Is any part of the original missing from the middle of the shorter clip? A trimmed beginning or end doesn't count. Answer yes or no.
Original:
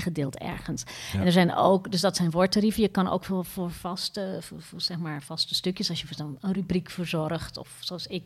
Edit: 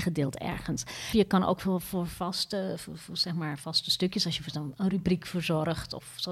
yes